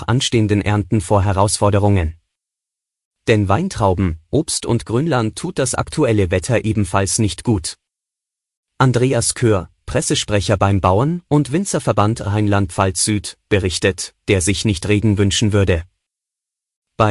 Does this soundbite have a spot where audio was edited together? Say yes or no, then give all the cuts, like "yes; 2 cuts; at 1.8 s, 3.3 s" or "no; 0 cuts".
yes; 1 cut; at 14.2 s